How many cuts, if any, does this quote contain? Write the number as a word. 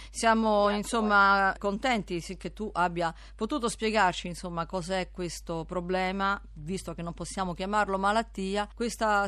zero